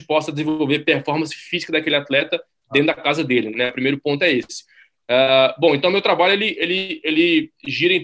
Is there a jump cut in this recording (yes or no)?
yes